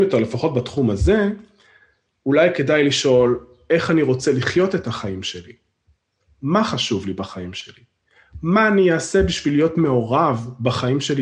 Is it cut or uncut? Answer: uncut